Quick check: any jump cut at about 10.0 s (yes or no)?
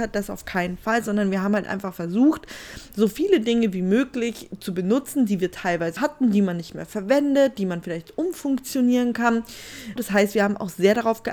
yes